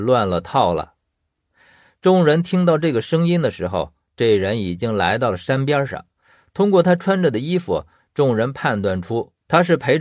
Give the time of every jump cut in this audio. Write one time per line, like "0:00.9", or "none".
0:01.9